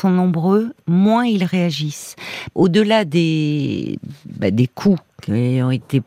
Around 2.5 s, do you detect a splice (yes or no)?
yes